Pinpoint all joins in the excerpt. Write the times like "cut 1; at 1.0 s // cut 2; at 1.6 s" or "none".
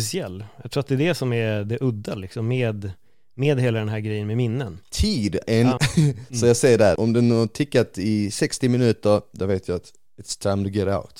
cut 1; at 5.8 s // cut 2; at 7.0 s